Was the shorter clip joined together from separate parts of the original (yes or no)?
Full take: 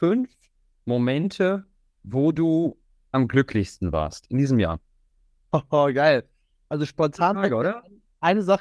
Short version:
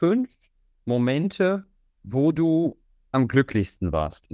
no